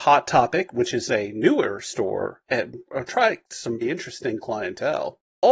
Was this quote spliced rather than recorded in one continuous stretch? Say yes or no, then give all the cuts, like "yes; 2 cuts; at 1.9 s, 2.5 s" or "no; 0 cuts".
yes; 1 cut; at 3.8 s